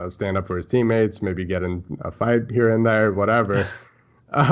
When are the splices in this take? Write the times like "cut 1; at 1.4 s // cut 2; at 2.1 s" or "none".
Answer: none